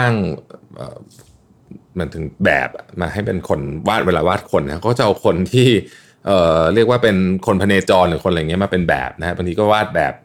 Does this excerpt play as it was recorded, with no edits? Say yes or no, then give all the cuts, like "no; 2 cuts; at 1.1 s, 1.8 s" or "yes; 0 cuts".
yes; 0 cuts